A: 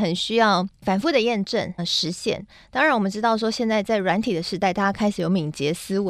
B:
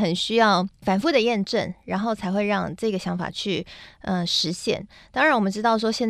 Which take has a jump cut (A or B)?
A